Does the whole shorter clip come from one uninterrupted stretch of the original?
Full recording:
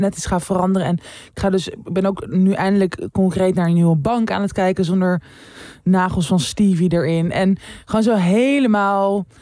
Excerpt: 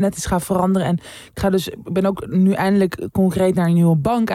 yes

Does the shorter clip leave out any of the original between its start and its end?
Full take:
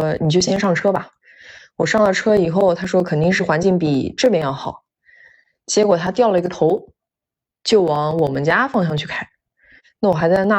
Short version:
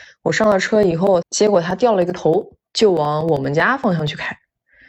yes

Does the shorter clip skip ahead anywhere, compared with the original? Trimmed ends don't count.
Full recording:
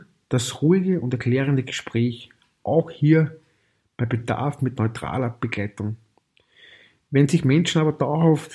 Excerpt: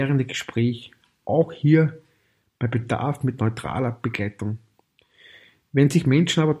no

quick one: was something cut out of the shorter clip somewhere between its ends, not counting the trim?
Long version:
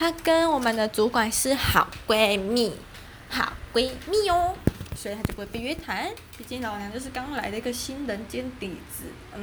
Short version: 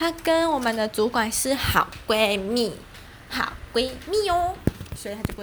no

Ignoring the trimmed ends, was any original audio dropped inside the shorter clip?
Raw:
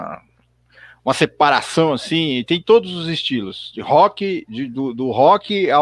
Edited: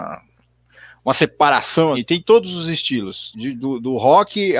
yes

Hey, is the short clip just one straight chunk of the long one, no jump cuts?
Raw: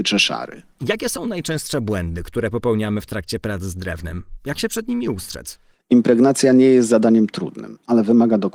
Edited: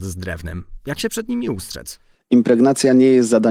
yes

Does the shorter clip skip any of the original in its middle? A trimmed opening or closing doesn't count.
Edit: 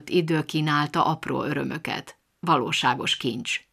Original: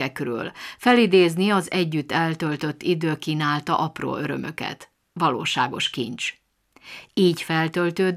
no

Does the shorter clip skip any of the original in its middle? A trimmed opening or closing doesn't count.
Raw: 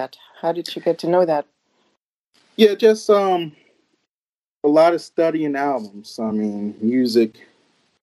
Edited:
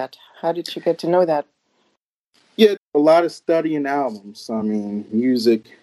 yes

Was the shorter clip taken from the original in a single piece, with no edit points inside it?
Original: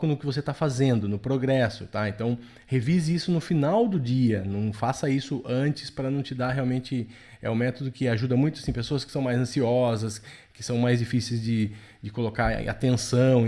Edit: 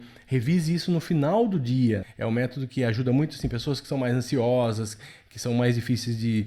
no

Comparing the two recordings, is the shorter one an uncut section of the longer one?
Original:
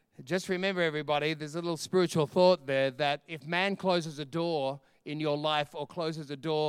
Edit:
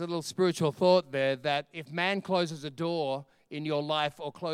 yes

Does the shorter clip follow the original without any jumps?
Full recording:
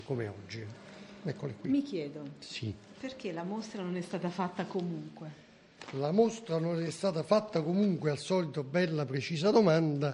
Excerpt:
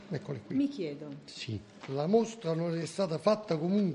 no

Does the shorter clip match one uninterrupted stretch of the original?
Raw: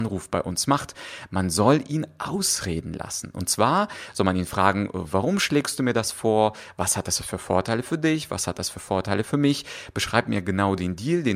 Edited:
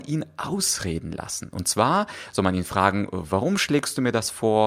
yes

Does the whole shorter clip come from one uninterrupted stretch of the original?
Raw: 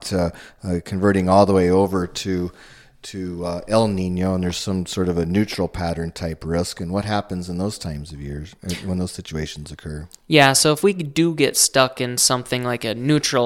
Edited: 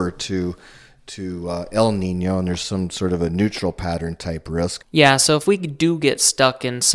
no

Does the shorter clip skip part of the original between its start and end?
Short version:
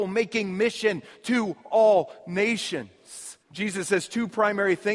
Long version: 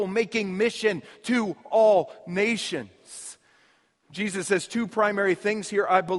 yes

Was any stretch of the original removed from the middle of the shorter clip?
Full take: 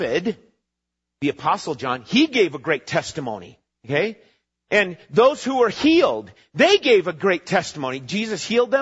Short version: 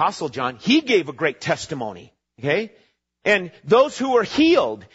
no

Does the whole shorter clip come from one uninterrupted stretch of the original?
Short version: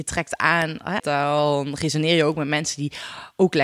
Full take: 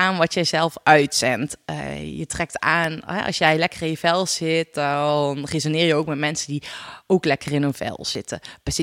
no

